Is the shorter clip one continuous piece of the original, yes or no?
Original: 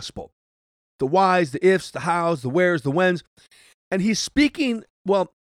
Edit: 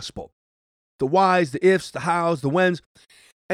no